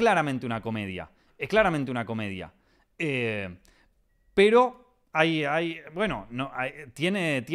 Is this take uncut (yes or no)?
yes